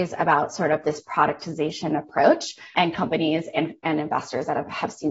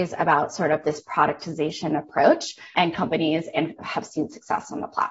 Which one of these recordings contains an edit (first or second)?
second